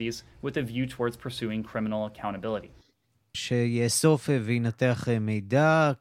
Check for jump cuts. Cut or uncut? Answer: cut